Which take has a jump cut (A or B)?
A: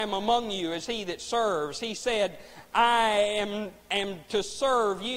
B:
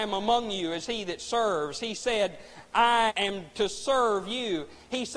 B